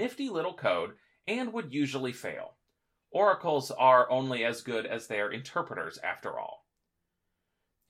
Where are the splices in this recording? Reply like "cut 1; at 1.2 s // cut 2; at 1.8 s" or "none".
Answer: none